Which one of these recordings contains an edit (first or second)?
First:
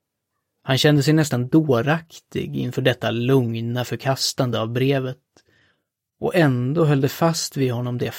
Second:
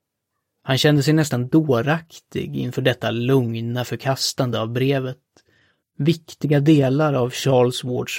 second